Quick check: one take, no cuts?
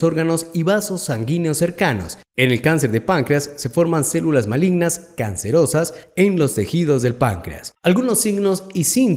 yes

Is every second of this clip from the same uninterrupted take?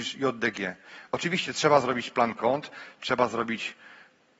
no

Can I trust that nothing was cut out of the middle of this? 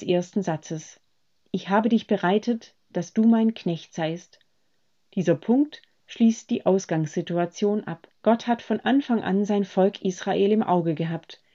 no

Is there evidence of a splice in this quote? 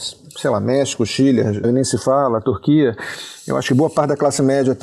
yes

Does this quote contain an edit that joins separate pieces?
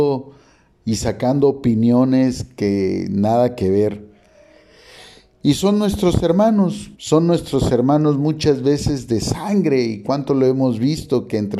yes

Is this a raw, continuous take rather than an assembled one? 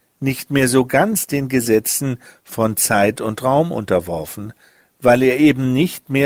yes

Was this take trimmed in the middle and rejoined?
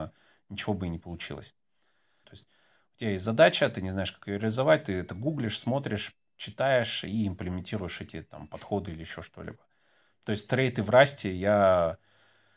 yes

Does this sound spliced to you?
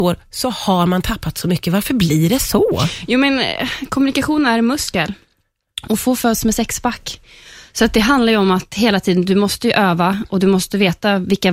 no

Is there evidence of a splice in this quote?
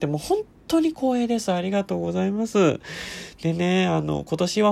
no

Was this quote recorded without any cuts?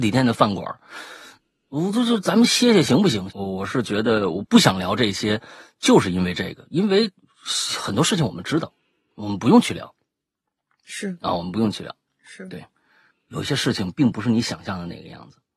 no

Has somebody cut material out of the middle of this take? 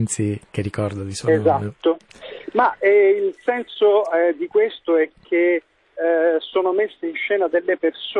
no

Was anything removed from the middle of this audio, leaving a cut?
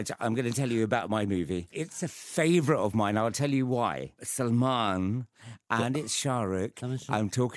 no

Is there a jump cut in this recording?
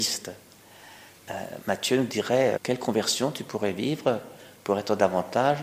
yes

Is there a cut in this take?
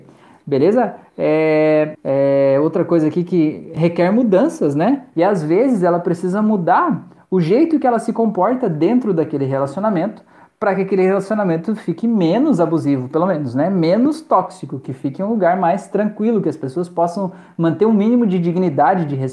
yes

